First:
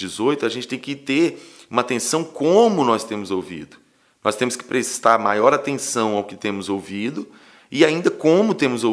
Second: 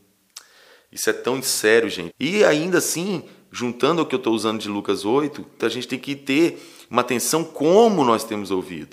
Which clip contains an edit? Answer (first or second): second